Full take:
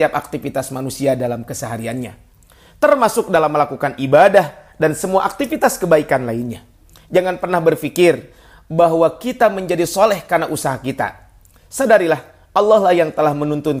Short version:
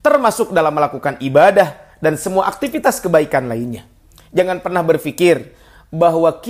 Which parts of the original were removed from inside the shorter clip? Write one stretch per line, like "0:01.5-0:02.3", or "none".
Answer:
none